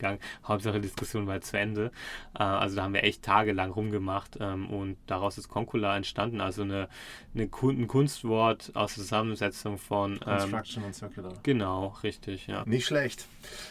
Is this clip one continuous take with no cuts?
no; 1 cut; at 12.6 s

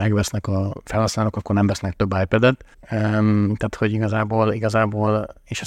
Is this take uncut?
no; 1 cut; at 2.7 s

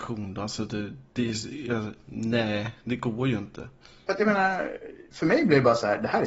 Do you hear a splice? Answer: no; 0 cuts

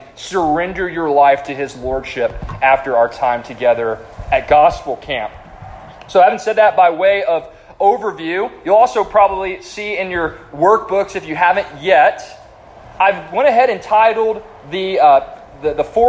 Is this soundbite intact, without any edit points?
yes; 0 cuts

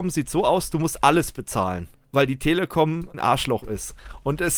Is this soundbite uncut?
no; 2 cuts; at 2.0 s, 3.1 s

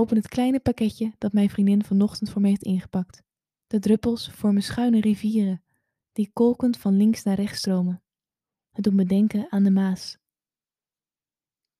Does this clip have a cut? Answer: yes; 1 cut; at 3.6 s

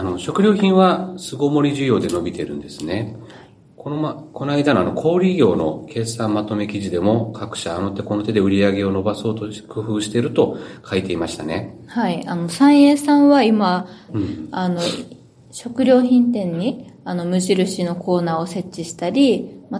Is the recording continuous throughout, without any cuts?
no; 1 cut; at 14.1 s

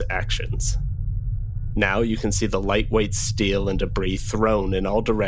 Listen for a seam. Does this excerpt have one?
yes; 1 cut; at 1.7 s

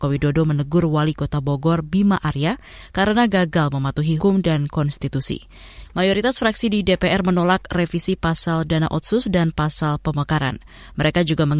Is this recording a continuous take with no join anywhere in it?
no; 2 cuts; at 4.2 s, 5.8 s

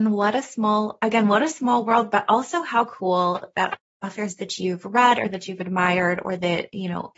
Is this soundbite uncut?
yes; 0 cuts

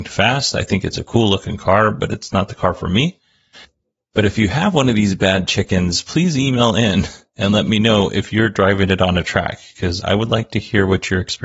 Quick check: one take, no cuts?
no; 1 cut; at 10.0 s

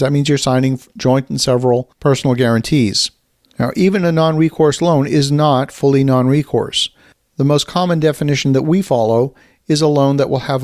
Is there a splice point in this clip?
no; 0 cuts

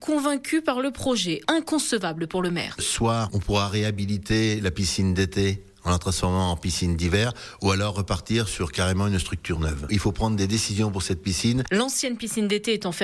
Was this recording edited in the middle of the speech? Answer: yes; 2 cuts; at 1.4 s, 9.9 s

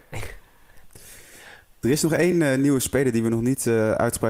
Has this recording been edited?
no; 0 cuts

